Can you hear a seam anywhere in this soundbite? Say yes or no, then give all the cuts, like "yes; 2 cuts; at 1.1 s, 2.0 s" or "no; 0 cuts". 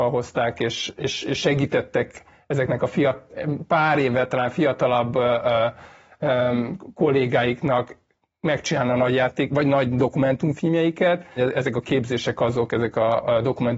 yes; 1 cut; at 11.4 s